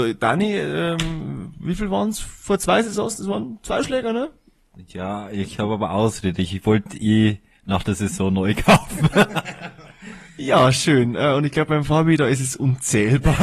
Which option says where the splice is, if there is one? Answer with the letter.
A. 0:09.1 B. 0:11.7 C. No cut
C